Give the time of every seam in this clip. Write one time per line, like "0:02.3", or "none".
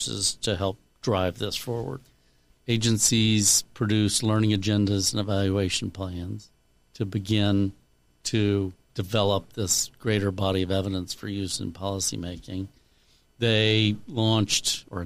0:02.5